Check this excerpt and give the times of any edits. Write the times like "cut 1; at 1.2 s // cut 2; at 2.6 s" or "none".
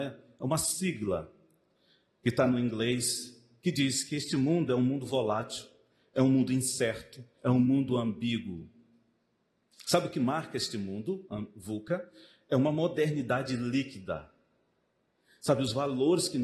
cut 1; at 7.4 s